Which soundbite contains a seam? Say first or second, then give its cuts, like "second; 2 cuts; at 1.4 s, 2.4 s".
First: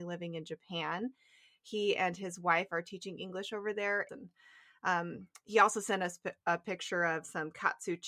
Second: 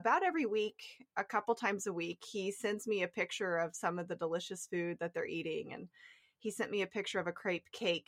first; 1 cut; at 4.1 s